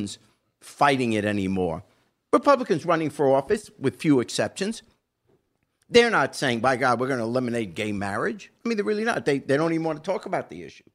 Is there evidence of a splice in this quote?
no; 0 cuts

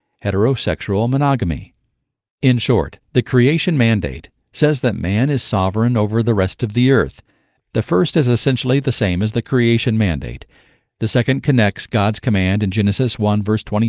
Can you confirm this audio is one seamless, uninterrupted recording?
no; 1 cut; at 7.6 s

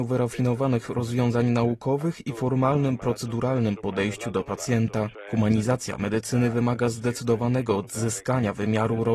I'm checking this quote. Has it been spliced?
no; 0 cuts

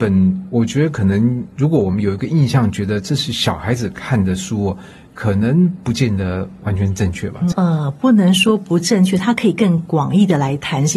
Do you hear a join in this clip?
yes; 1 cut; at 7.5 s

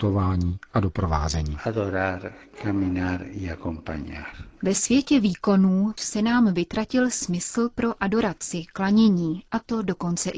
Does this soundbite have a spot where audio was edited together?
yes; 1 cut; at 6.0 s

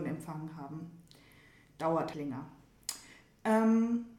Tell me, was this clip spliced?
yes; 1 cut; at 2.1 s

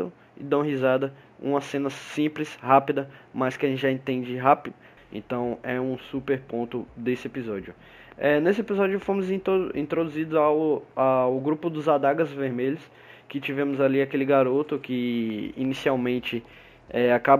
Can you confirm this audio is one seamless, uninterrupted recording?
no; 1 cut; at 5.0 s

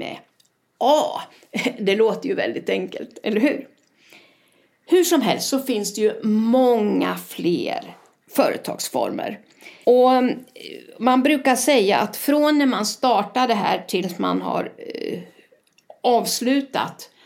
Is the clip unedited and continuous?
no; 1 cut; at 9.8 s

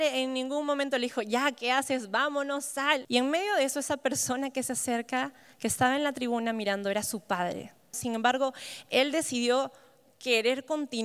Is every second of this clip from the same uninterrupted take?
no; 2 cuts; at 3.0 s, 7.9 s

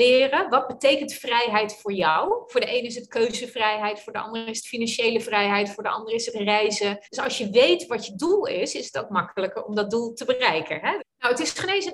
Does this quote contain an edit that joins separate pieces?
yes; 2 cuts; at 7.0 s, 11.0 s

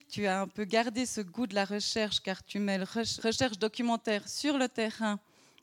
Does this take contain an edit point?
yes; 1 cut; at 3.2 s

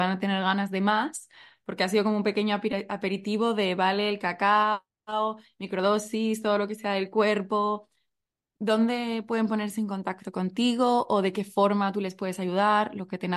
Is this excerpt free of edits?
yes; 0 cuts

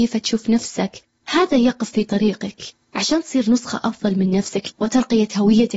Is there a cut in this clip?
yes; 1 cut; at 4.7 s

